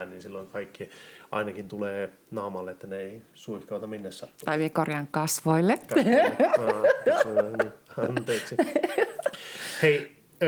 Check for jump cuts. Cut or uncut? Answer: uncut